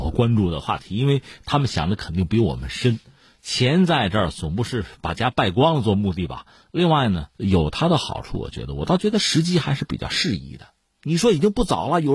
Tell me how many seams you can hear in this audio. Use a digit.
1